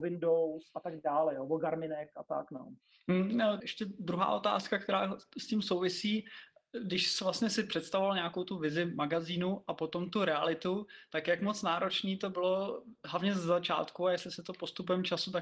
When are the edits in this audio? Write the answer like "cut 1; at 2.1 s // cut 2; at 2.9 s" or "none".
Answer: cut 1; at 3.6 s